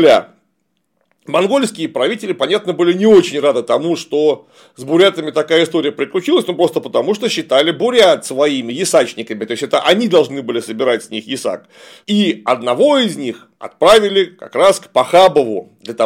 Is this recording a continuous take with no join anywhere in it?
no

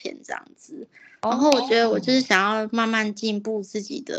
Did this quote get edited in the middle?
no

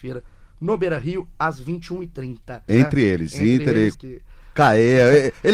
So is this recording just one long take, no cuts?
no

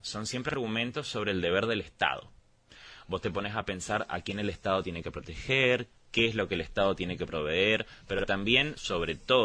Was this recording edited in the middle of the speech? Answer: no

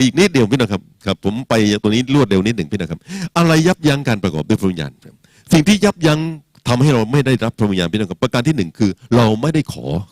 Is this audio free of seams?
yes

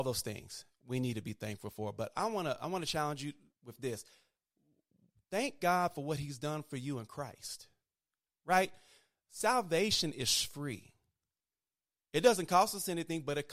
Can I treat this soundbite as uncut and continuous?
yes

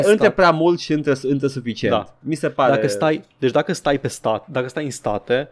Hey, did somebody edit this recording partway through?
no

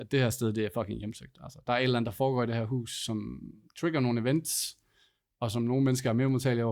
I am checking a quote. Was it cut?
no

